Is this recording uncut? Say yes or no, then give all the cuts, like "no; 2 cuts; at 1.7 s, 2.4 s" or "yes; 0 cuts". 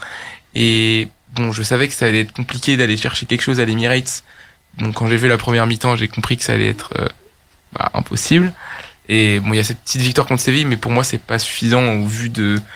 yes; 0 cuts